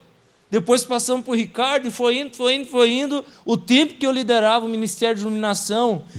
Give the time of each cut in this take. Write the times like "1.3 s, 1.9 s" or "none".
3.3 s